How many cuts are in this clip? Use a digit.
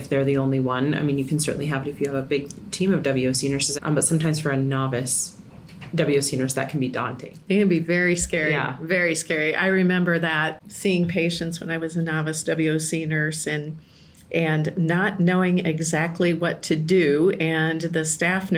1